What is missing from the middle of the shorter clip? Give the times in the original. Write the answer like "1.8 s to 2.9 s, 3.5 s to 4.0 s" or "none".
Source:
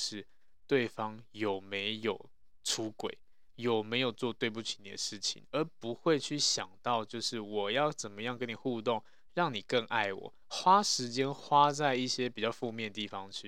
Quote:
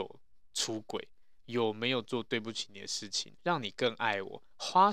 5.5 s to 9.3 s